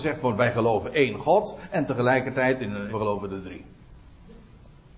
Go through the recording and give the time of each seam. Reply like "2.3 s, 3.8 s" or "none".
2.9 s

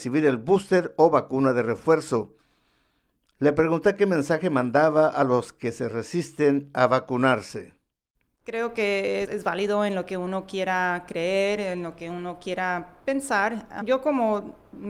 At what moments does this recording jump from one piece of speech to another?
9.3 s

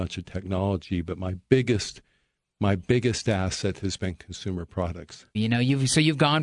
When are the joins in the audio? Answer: 5.3 s

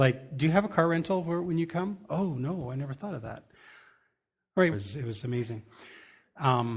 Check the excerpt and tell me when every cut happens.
4.7 s

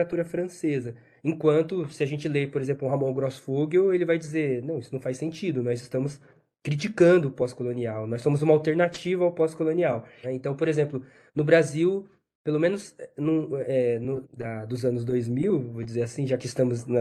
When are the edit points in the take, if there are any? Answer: 10.2 s, 14.2 s

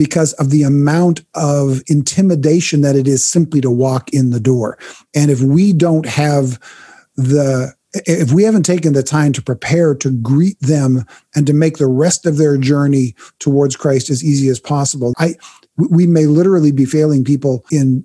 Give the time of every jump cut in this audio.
15.1 s

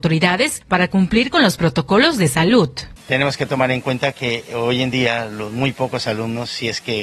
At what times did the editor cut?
3.0 s

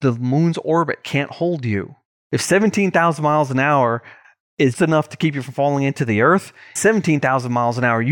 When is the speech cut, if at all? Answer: 4.7 s, 6.8 s

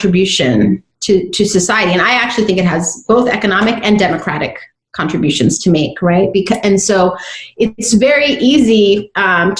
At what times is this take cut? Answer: none

